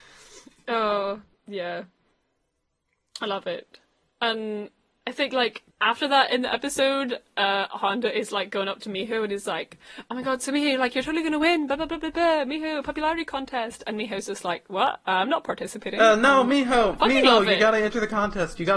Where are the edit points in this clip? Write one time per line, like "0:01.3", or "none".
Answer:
0:05.7